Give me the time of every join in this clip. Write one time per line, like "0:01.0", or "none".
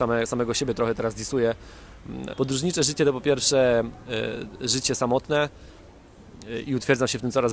0:02.3